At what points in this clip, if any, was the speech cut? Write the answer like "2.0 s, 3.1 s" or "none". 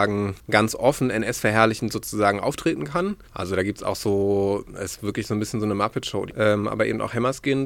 3.2 s, 6.3 s